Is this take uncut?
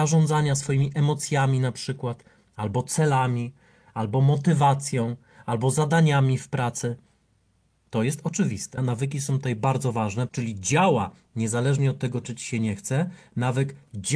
no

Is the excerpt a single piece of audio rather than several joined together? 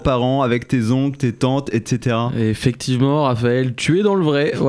yes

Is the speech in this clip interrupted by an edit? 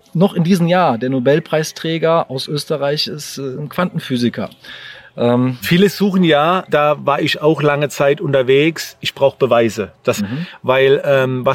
yes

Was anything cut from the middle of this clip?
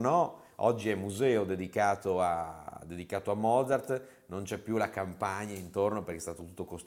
no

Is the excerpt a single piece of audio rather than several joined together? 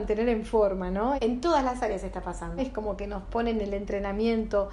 no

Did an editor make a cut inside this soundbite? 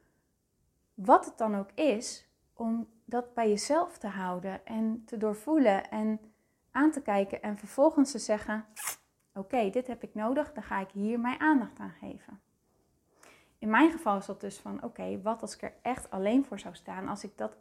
no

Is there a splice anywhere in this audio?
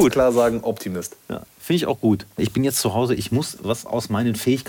yes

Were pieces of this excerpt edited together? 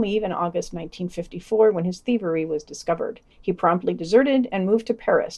yes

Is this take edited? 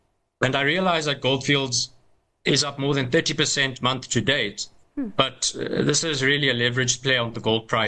no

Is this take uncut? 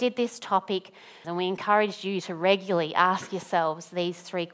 no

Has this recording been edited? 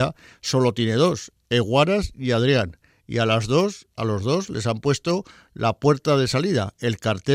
no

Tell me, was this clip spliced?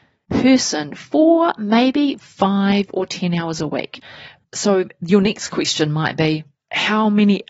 yes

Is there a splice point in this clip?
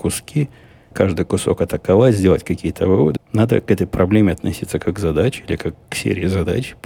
yes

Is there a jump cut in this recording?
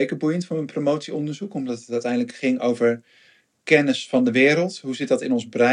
yes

